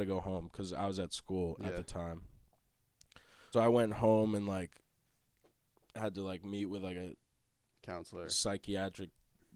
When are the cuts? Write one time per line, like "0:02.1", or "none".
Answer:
0:03.5